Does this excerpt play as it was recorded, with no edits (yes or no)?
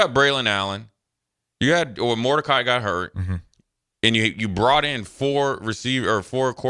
yes